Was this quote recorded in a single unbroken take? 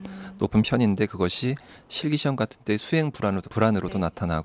no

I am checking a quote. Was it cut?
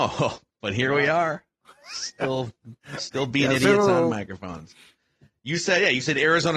no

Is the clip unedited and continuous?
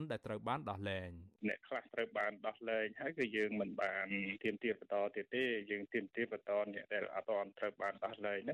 no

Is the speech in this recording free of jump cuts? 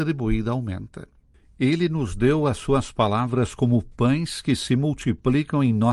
yes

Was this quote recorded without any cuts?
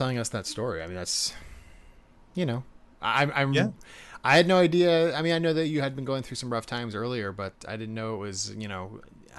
yes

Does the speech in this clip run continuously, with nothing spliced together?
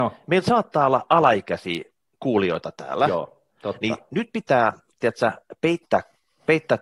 yes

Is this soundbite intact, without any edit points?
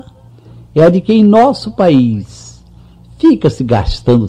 yes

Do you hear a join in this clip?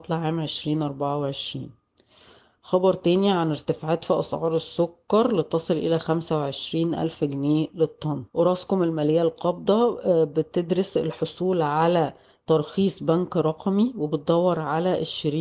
yes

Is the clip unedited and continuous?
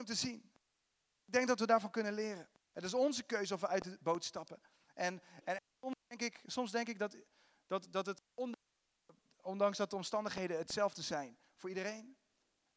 no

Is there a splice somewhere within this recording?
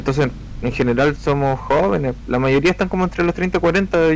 no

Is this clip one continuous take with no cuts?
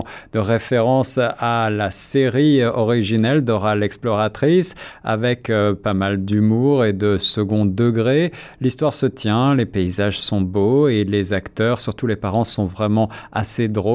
yes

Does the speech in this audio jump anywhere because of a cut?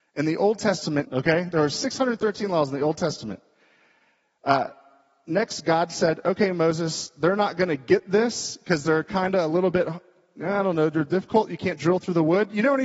yes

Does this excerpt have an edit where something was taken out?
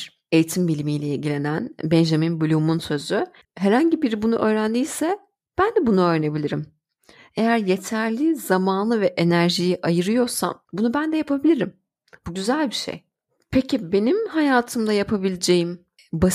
yes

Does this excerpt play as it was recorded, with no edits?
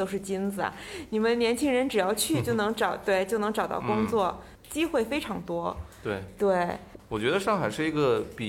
no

